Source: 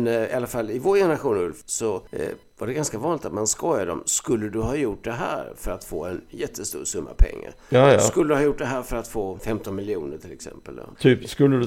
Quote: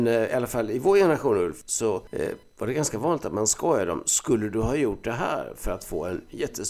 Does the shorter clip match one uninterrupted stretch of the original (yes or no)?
yes